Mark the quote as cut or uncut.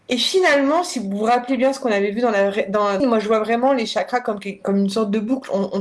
cut